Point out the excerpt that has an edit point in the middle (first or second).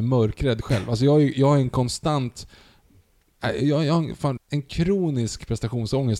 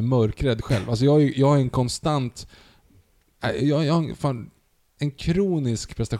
first